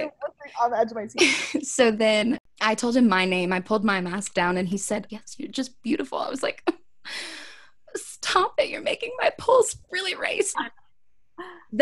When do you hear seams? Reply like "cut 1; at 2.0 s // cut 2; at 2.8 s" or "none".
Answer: cut 1; at 5.1 s // cut 2; at 10.5 s